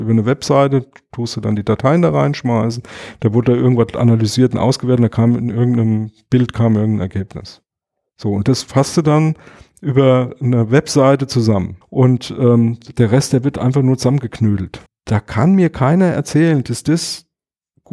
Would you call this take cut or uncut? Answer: cut